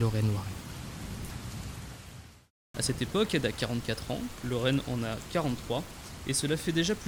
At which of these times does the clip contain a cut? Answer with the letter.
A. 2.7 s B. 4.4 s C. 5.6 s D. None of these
A